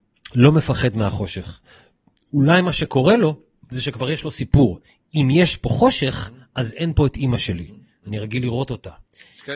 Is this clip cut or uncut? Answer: uncut